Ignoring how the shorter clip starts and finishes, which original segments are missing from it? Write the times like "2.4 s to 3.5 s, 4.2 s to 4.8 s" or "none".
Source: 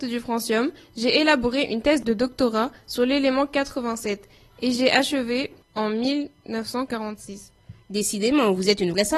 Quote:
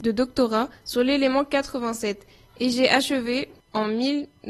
none